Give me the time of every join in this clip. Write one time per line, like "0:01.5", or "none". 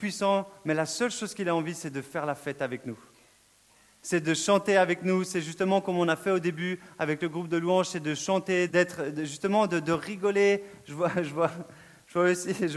0:08.7